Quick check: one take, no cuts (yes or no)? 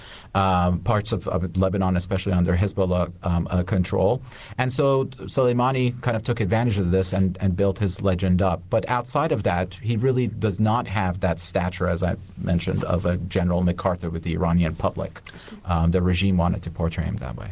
yes